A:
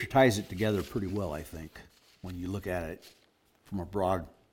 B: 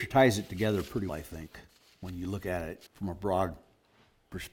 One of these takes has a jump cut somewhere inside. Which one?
B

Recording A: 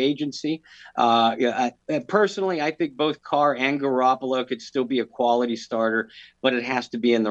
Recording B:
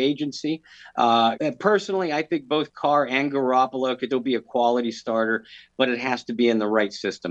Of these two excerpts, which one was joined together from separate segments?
B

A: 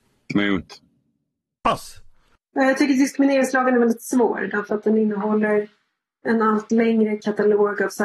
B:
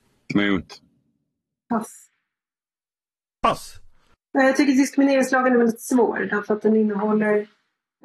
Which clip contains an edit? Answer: A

